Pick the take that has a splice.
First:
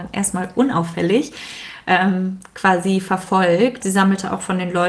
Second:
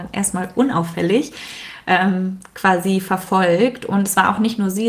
first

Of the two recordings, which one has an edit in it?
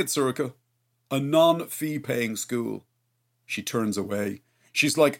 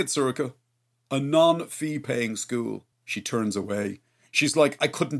second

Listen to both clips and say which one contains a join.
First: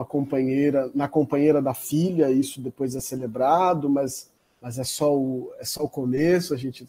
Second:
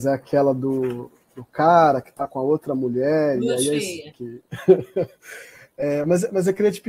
second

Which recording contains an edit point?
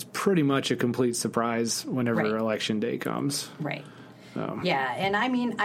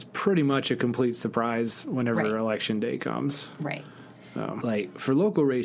second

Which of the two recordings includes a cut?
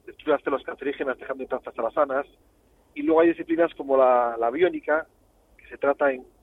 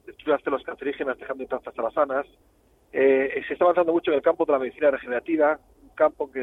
first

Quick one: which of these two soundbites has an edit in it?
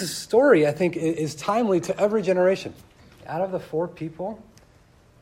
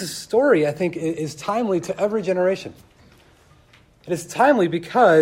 first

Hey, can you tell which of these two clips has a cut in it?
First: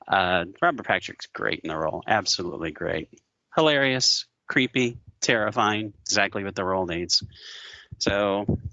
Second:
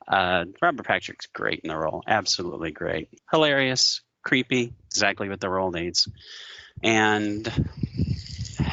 second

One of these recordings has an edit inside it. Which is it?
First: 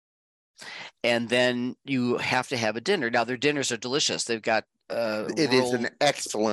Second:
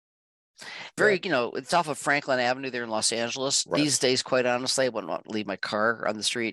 second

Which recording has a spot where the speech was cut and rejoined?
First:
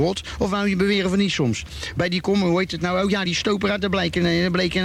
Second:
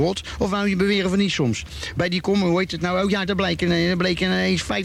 second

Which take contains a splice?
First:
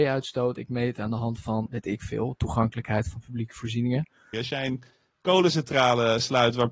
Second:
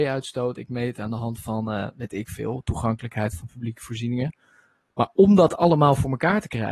first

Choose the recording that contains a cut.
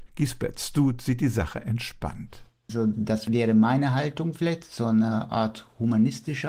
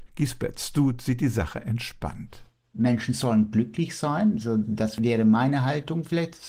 first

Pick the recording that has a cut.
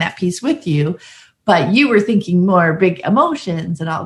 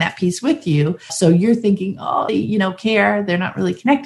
second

